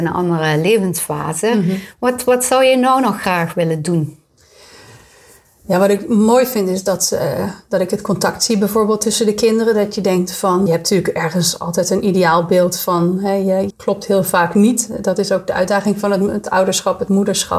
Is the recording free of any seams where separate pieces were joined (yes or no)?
no